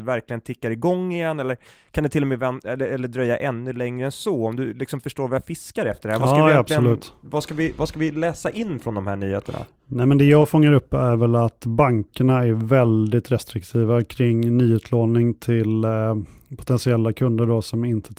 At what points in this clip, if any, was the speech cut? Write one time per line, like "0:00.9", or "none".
none

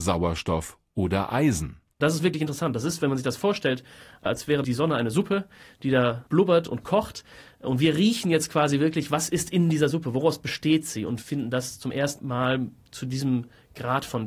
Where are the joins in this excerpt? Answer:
none

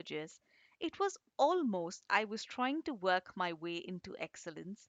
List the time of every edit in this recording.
0:02.1

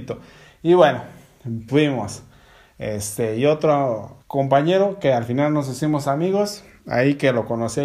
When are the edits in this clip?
0:01.7
0:04.2

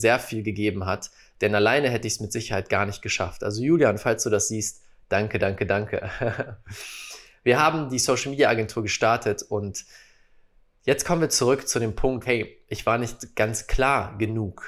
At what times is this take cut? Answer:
0:12.3

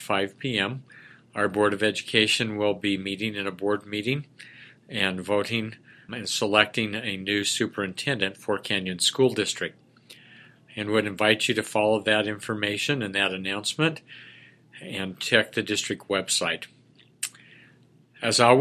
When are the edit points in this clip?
0:06.1

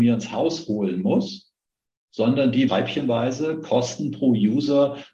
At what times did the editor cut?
0:02.7

